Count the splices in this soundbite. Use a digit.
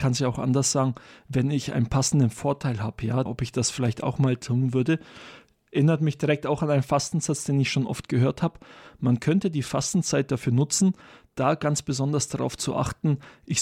1